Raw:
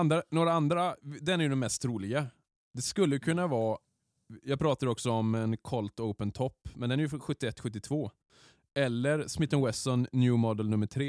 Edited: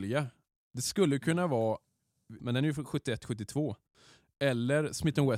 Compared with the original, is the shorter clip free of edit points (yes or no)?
no